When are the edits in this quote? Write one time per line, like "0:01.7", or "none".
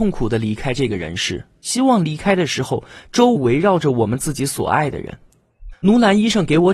0:03.4
0:05.7